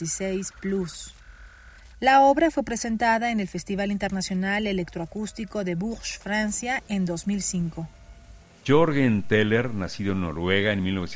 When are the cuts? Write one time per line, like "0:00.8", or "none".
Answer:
none